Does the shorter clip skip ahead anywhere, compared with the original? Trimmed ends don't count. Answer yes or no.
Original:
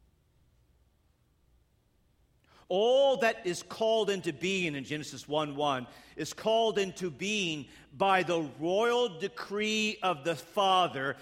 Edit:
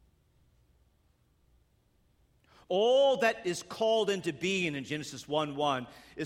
no